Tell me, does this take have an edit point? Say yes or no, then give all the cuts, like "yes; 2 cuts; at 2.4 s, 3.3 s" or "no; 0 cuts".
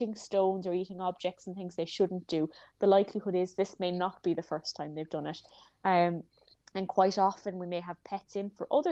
no; 0 cuts